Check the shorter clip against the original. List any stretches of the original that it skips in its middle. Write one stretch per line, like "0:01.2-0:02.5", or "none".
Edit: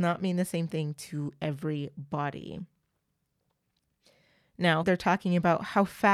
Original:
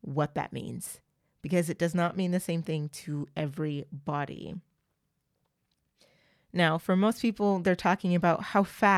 0:06.8-0:07.6

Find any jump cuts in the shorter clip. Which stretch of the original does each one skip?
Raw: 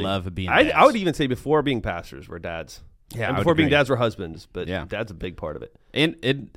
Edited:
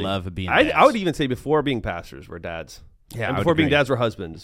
none

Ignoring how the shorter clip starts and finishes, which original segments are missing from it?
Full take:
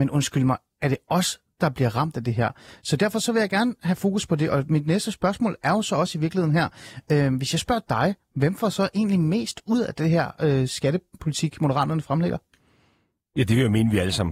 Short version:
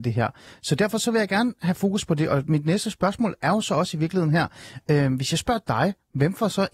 none

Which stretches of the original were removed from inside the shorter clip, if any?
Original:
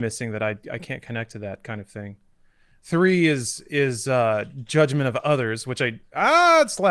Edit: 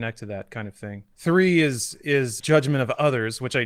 0:02.2-0:02.8
0:04.0-0:04.6

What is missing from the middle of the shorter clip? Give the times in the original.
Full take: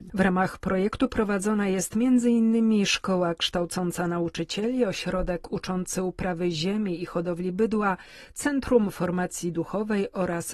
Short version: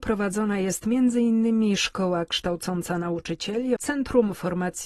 0:04.9-0:08.3

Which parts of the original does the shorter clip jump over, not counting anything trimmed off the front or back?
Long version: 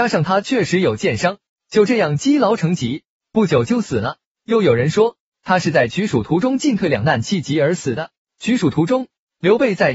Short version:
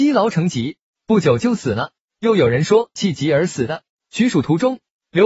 0:05.2-0:07.2

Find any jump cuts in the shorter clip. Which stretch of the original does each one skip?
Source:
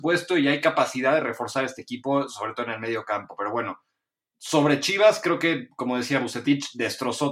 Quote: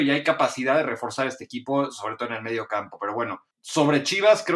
0:03.9-0:04.3

